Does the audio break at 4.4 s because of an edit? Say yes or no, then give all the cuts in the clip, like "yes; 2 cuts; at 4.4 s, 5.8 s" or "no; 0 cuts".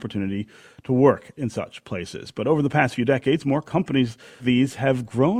yes; 1 cut; at 4.4 s